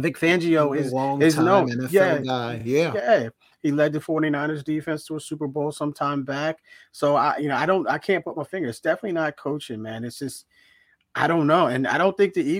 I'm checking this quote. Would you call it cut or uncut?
uncut